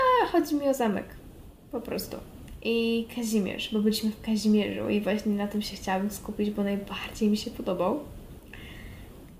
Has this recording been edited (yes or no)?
no